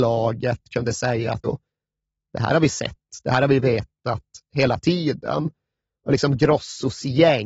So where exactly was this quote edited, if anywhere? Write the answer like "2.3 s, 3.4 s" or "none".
1.4 s